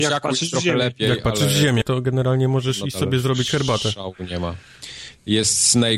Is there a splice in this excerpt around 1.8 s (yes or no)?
yes